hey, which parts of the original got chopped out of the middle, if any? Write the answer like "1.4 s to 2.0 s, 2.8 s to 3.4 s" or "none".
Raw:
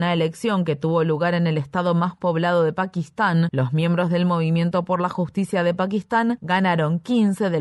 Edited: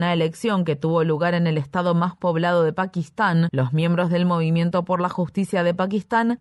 none